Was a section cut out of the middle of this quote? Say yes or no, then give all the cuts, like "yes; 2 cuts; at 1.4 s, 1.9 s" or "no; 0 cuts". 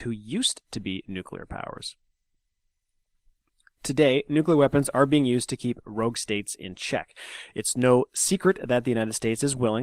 no; 0 cuts